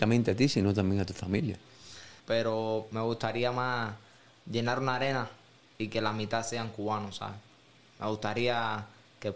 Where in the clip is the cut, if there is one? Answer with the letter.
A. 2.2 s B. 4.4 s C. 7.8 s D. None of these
A